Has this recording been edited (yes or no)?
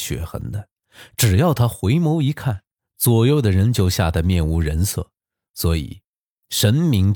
no